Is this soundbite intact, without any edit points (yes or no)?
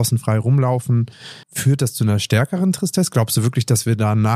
no